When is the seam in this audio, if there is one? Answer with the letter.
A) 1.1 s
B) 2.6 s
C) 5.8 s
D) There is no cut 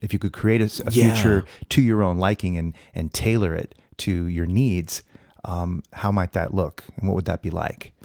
D